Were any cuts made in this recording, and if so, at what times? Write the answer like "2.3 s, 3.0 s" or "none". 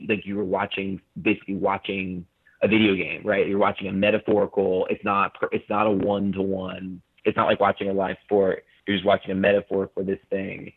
none